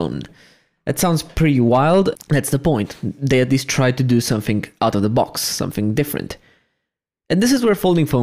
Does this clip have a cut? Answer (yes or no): yes